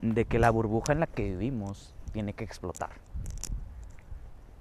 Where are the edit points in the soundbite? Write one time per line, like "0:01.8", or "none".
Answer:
0:02.1